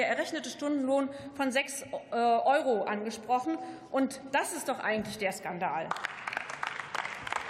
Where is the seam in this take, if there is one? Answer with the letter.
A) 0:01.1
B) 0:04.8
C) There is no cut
C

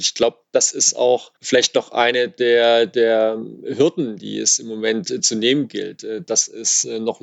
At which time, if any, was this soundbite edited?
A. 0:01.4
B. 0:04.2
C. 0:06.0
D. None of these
A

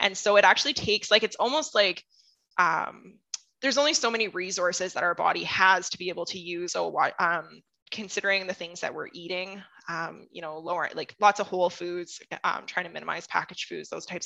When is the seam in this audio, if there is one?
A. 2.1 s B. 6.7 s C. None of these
B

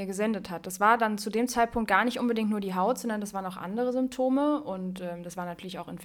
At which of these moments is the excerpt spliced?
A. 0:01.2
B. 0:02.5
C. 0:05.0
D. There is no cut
D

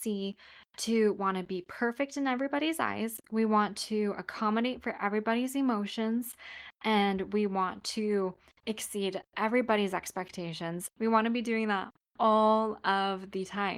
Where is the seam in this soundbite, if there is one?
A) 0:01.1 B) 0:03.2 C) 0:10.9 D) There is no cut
C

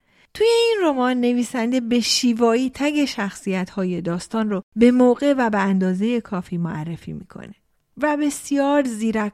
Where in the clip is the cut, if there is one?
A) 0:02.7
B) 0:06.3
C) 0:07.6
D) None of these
A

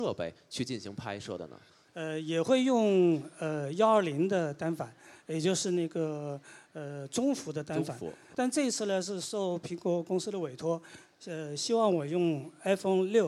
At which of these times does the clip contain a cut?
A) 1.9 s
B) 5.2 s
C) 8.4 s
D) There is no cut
A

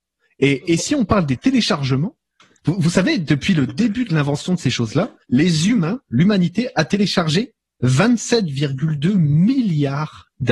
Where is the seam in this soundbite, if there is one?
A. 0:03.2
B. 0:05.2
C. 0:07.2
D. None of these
B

